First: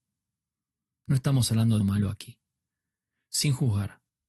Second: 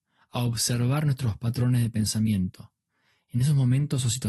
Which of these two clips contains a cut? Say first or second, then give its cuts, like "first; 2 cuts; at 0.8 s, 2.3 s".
first; 1 cut; at 1.8 s